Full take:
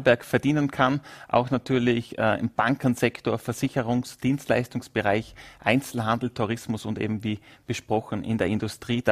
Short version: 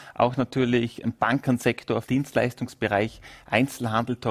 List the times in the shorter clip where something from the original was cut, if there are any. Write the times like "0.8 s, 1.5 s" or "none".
1.0 s, 2.0 s